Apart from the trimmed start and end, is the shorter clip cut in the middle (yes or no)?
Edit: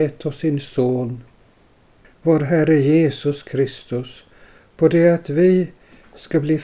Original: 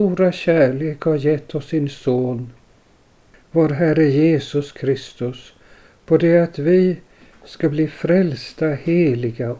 no